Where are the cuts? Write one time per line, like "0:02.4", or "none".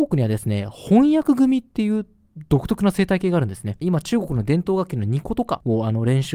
0:03.8